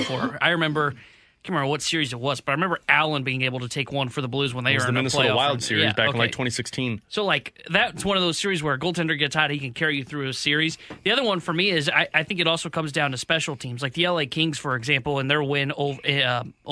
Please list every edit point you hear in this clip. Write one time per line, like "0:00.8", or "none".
none